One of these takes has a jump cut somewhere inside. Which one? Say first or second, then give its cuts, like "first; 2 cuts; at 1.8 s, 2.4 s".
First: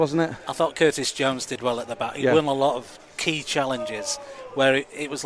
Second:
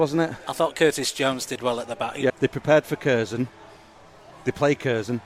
second; 1 cut; at 2.3 s